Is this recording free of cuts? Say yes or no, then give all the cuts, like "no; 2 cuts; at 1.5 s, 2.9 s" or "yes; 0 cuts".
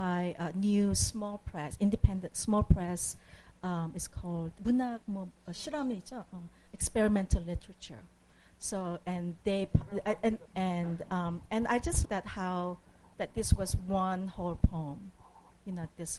no; 3 cuts; at 4.6 s, 10.5 s, 12.1 s